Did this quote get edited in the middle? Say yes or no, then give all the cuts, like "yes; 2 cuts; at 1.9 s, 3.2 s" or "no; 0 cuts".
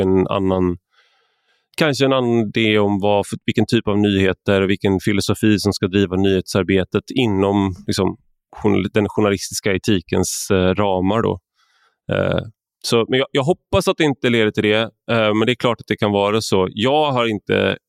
no; 0 cuts